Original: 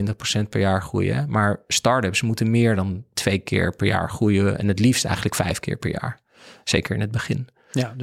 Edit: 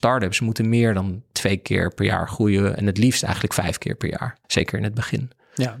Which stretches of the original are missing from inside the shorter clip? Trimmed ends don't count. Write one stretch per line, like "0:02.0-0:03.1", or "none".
0:06.3-0:06.6